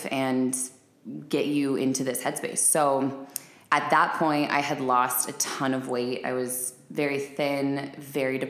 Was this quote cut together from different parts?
no; 0 cuts

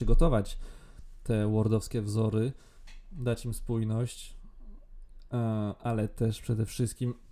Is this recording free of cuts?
yes; 0 cuts

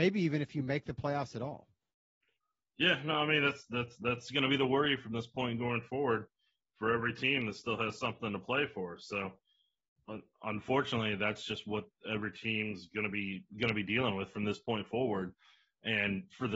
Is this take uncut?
yes; 0 cuts

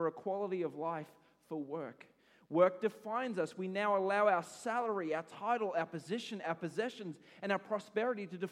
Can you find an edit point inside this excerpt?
yes; 1 cut; at 6.4 s

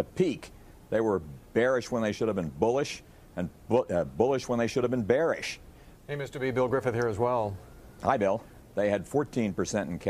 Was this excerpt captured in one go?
no; 2 cuts; at 6.0 s, 8.6 s

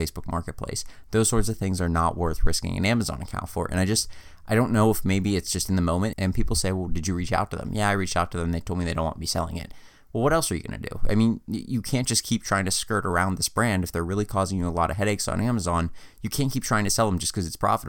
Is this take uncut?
no; 1 cut; at 6.1 s

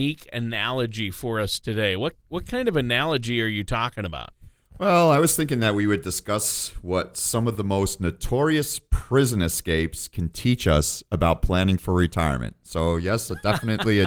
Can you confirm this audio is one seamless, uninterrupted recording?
yes; 0 cuts

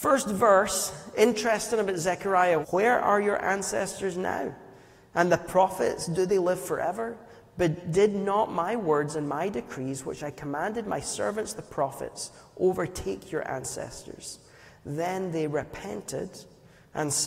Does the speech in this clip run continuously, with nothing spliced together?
no; 1 cut; at 2.6 s

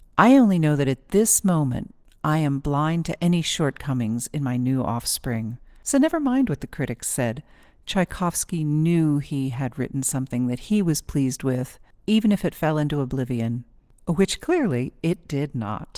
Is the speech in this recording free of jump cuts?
yes; 0 cuts

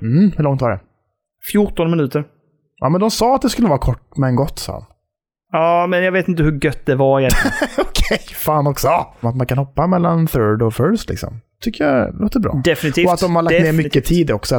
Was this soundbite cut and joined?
yes; 1 cut; at 9.2 s

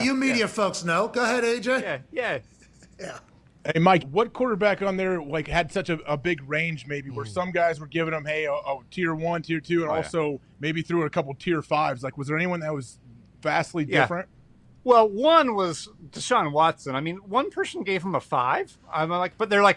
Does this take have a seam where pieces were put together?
yes; 1 cut; at 4.0 s

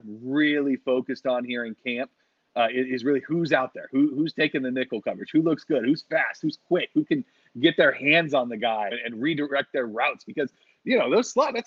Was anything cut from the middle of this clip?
yes; 1 cut; at 8.9 s

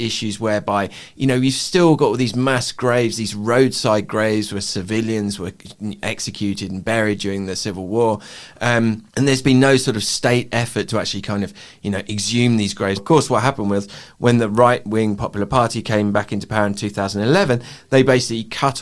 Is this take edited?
yes; 2 cuts; at 9.1 s, 13.0 s

